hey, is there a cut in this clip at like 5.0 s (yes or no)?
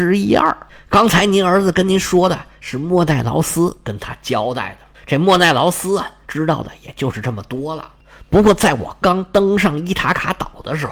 no